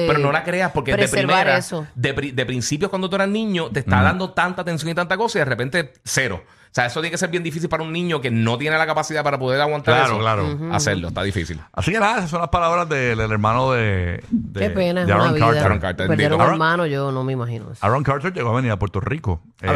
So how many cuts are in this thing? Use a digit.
0